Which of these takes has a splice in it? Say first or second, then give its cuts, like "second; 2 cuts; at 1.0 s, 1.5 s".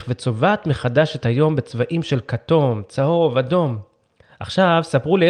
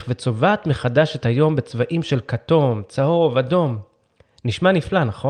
first; 1 cut; at 4.2 s